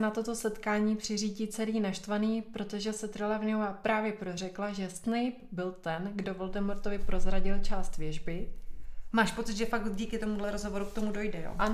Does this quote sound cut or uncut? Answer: cut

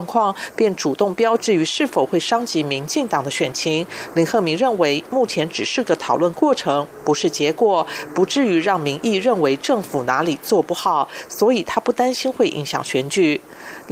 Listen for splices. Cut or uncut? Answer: cut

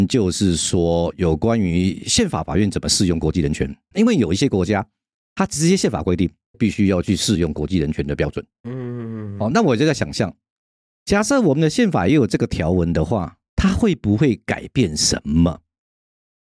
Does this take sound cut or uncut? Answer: cut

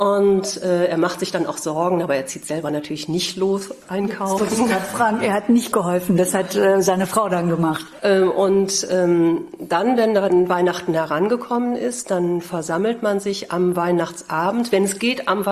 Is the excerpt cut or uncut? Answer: cut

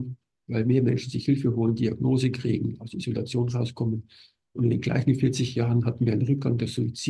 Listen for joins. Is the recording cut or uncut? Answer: uncut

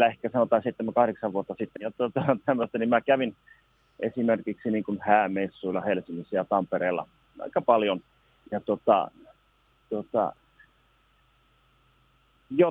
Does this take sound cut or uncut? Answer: cut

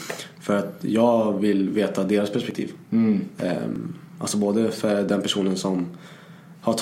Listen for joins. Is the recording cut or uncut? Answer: uncut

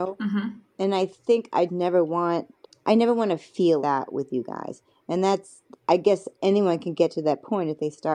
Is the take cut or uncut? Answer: cut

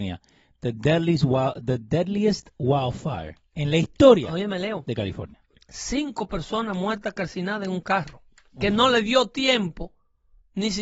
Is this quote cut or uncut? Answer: uncut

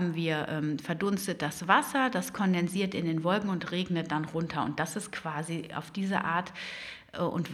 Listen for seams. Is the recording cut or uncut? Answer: uncut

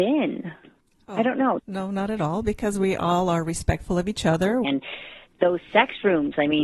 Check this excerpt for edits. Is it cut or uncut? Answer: cut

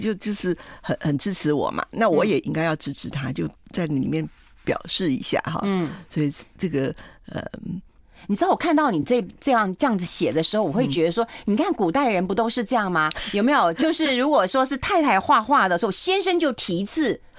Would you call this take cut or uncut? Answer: uncut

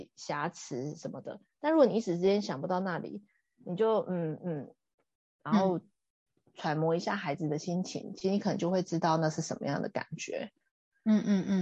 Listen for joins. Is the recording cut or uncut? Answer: uncut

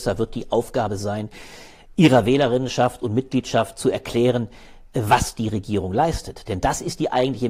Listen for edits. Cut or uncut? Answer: uncut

